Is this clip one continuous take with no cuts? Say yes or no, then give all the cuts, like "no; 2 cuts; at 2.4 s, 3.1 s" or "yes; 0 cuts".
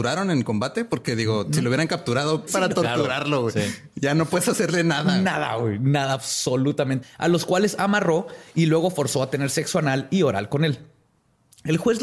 no; 2 cuts; at 2.5 s, 7.0 s